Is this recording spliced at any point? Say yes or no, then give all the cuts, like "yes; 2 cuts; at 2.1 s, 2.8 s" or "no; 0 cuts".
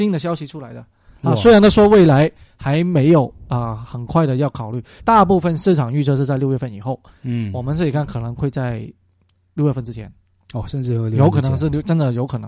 yes; 1 cut; at 5.0 s